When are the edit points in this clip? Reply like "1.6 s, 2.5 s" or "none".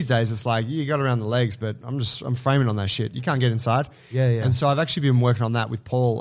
none